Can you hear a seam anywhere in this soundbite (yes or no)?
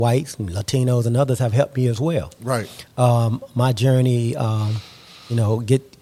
no